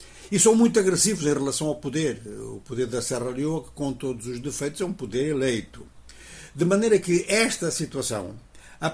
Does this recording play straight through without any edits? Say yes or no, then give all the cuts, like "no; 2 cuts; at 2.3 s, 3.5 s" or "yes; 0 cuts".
yes; 0 cuts